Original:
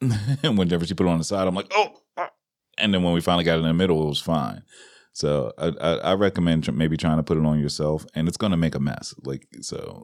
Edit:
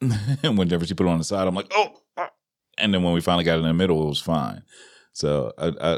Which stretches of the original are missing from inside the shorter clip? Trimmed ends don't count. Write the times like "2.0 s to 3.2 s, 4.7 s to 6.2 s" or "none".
none